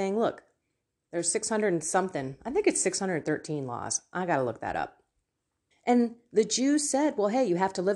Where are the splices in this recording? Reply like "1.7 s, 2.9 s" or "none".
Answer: 5.7 s